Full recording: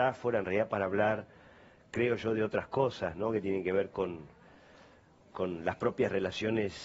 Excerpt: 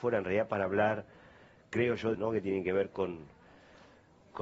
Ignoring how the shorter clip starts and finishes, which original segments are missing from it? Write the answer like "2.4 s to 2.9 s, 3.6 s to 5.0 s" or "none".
2.3 s to 3.1 s